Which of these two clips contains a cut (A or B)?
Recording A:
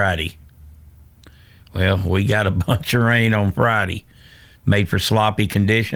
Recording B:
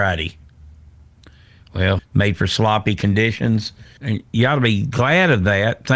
B